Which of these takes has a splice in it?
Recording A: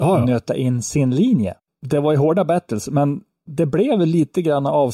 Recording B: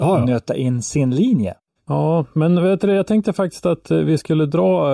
B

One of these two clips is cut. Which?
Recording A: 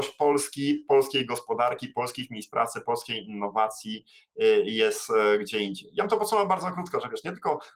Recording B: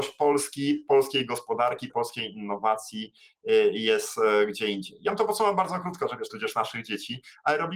B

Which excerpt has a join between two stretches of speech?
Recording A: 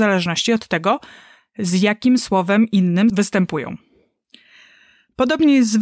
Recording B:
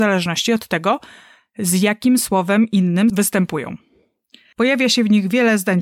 B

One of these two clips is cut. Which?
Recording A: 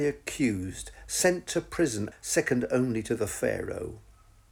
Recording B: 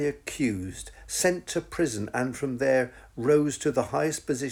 A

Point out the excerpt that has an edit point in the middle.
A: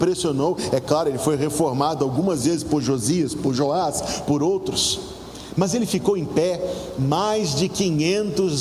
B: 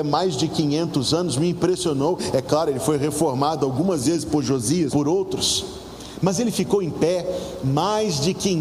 B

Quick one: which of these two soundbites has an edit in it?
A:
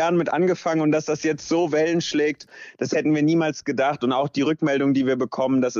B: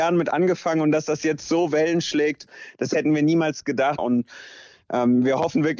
B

